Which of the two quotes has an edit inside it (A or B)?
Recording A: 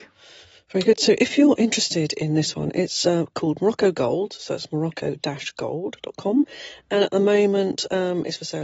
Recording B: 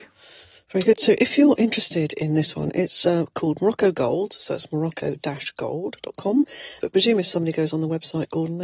B